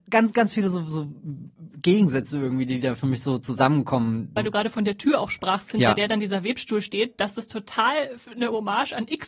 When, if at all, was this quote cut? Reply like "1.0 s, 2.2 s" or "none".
4.4 s